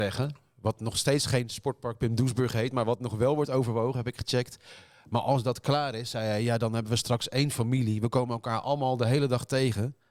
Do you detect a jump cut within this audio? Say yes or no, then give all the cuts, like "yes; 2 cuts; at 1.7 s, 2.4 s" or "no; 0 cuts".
no; 0 cuts